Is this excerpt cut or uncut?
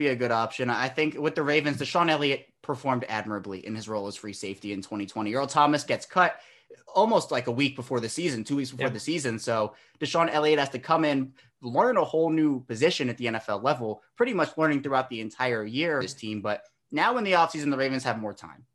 cut